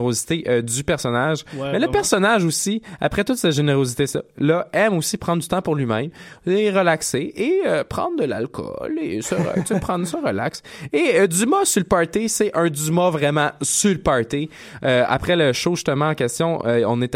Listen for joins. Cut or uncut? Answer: uncut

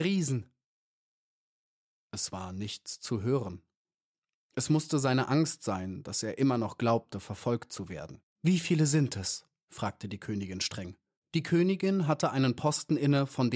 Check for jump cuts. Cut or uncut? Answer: cut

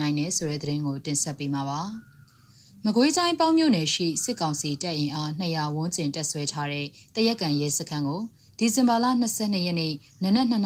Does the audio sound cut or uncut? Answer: uncut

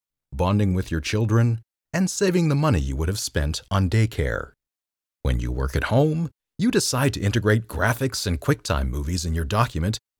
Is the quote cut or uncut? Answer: cut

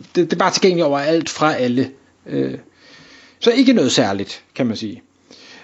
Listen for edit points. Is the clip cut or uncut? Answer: uncut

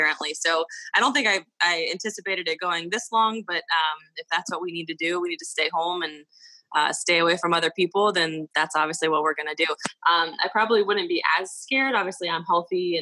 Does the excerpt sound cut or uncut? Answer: uncut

